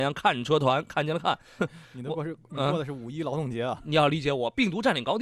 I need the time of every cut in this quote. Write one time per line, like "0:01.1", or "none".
0:01.6